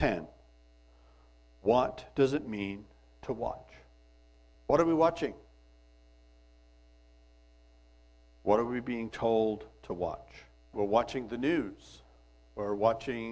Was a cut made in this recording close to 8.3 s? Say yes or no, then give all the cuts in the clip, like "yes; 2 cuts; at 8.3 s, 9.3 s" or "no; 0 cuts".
no; 2 cuts; at 4.5 s, 10.7 s